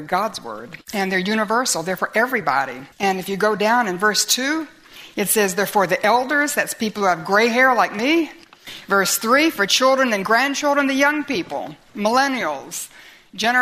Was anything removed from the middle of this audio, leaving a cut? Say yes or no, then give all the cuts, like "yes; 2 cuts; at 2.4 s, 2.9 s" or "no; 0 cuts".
yes; 1 cut; at 2.9 s